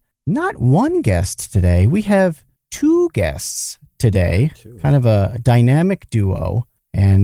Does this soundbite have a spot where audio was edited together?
no; 0 cuts

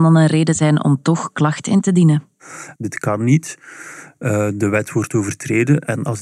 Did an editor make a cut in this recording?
yes; 1 cut; at 2.8 s

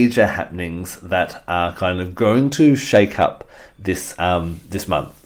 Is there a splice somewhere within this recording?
no; 0 cuts

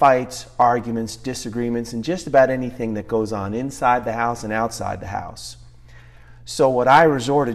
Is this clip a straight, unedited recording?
yes; 0 cuts

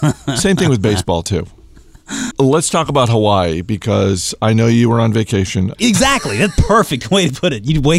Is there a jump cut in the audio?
yes; 2 cuts; at 2.3 s, 5.7 s

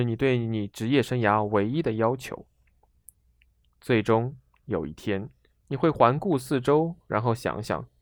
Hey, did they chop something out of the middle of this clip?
no; 0 cuts

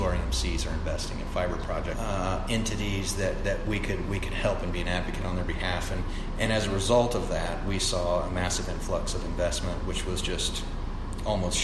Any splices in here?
yes; 1 cut; at 1.9 s

